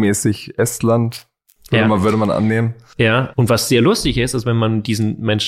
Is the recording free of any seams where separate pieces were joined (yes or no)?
no